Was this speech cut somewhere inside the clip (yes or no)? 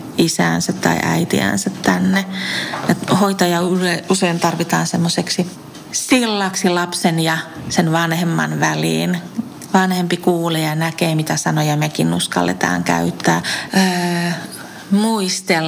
yes